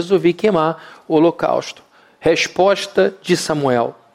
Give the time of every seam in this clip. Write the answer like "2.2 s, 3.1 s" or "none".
none